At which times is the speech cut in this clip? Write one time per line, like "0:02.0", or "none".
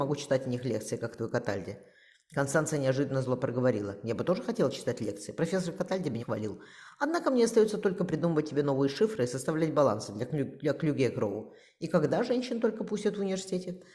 0:06.2